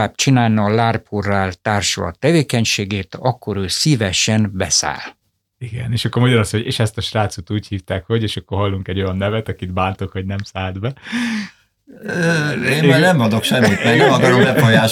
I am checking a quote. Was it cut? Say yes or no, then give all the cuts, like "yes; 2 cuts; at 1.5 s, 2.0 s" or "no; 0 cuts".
no; 0 cuts